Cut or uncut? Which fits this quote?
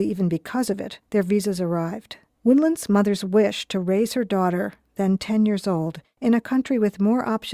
uncut